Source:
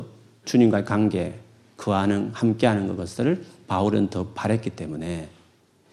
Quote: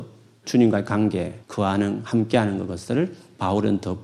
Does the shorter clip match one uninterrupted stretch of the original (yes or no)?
no